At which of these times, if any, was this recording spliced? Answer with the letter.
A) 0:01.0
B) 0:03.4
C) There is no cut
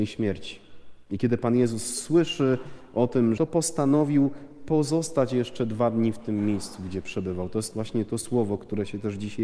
B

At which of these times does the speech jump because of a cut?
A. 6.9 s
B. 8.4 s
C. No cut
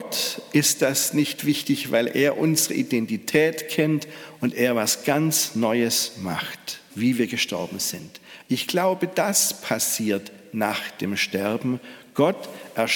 A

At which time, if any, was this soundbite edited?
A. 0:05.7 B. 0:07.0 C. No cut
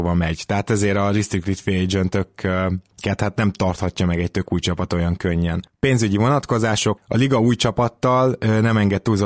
C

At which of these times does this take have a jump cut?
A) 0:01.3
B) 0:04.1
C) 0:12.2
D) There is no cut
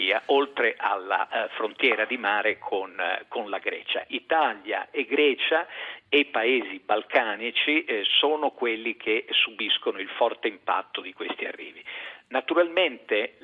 D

